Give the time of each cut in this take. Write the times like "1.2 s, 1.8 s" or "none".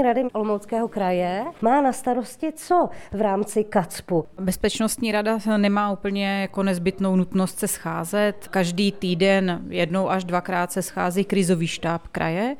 none